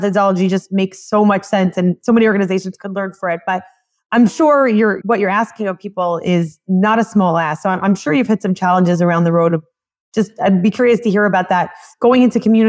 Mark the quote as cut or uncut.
cut